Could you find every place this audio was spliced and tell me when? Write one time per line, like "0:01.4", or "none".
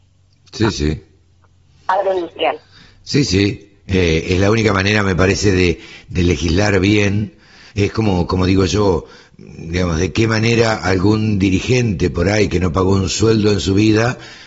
0:07.7